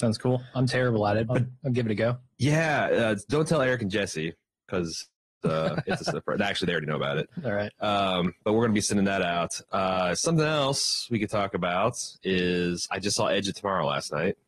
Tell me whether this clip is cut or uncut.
cut